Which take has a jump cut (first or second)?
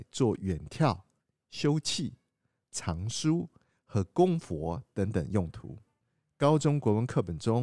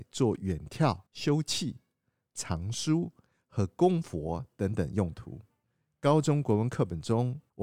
second